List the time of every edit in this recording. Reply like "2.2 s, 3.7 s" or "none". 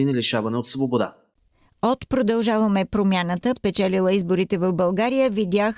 3.6 s